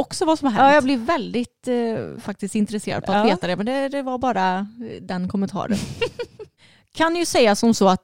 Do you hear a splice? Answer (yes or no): no